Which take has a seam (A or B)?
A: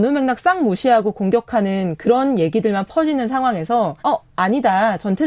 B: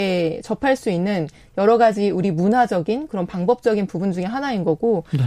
A